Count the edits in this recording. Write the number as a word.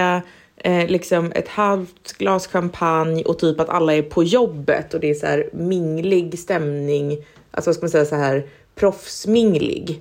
zero